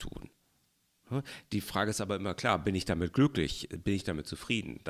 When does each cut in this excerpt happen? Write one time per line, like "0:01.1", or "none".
none